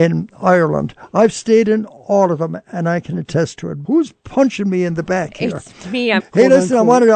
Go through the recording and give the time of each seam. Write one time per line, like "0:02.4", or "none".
0:03.8
0:06.2